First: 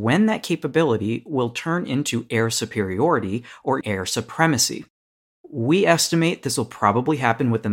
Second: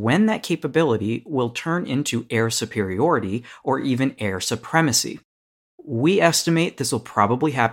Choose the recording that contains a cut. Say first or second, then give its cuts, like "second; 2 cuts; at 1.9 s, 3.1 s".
first; 1 cut; at 3.8 s